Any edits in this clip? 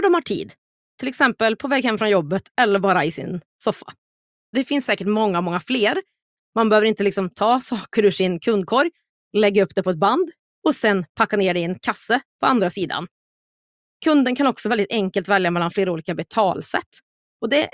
yes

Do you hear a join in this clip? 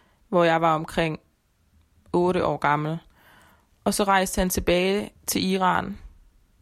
no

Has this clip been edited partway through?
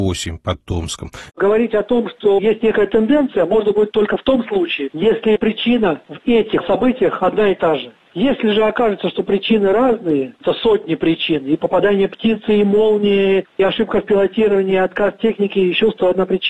yes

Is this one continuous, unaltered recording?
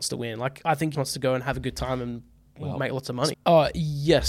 no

